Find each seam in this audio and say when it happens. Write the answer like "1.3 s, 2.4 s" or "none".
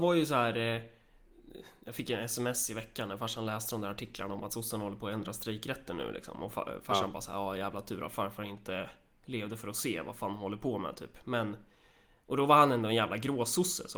none